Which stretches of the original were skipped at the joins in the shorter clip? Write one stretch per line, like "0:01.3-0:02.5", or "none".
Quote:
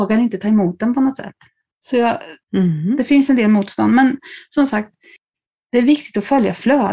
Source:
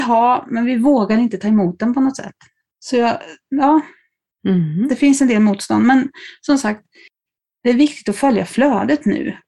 0:03.4-0:04.3